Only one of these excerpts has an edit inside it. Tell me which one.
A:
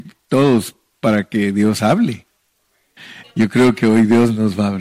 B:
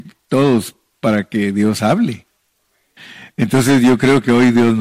A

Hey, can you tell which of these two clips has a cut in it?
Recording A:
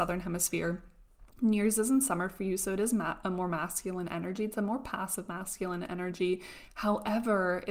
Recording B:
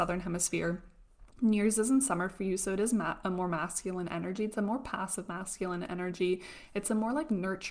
A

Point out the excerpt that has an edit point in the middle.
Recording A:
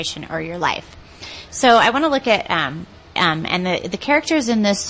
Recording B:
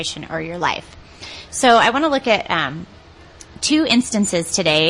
A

